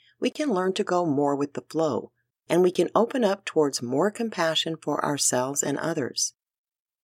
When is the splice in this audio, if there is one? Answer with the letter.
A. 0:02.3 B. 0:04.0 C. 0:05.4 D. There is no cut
A